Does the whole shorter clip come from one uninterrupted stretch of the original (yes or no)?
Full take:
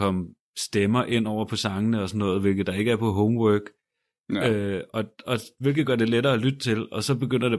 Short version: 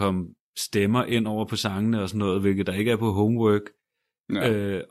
yes